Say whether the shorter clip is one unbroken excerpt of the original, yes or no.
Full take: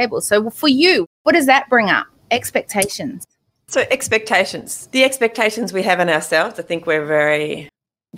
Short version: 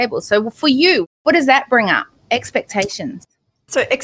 yes